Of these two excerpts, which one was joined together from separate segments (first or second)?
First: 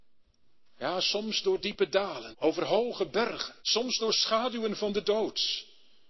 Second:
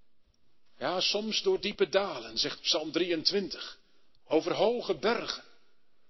first